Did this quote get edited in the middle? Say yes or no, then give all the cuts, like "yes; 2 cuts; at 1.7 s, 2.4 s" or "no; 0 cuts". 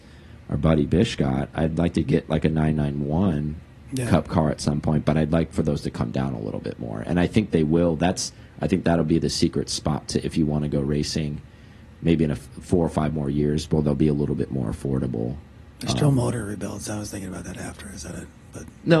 no; 0 cuts